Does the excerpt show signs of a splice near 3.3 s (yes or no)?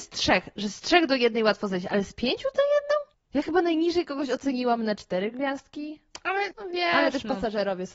no